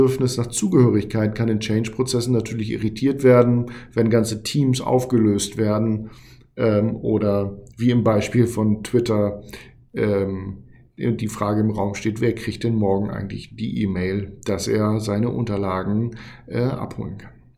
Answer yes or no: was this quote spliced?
no